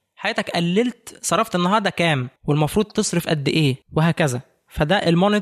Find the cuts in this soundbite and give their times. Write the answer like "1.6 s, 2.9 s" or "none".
2.4 s, 3.8 s